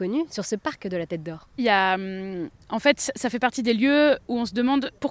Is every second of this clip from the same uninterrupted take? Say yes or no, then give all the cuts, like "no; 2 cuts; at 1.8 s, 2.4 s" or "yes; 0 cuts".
no; 1 cut; at 1.6 s